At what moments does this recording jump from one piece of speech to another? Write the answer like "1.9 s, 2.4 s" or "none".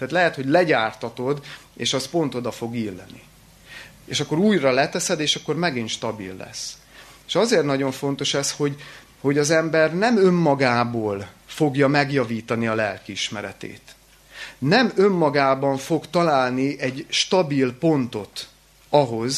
11.4 s